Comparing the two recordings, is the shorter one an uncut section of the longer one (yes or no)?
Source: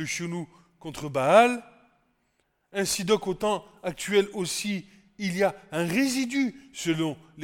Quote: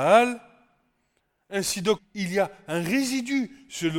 no